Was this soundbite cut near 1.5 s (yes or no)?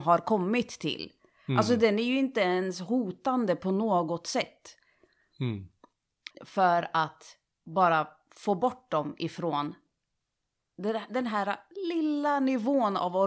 no